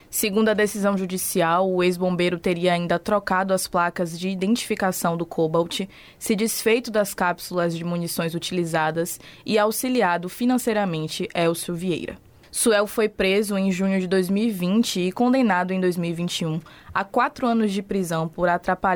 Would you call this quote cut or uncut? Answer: uncut